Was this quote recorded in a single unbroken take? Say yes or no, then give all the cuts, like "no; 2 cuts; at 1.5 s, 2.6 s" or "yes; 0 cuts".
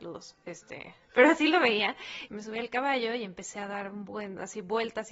no; 2 cuts; at 1.1 s, 2.3 s